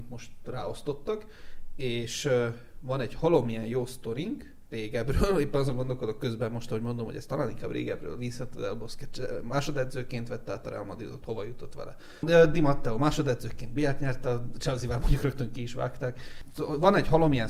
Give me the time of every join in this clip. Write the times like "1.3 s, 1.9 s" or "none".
none